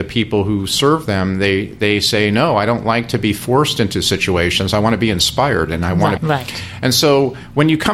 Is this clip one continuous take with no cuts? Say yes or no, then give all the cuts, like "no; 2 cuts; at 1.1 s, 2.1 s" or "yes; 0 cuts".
no; 1 cut; at 6.2 s